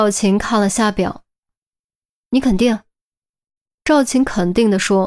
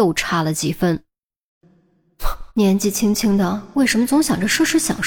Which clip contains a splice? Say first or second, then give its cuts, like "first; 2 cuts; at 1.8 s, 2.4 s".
second; 1 cut; at 2.5 s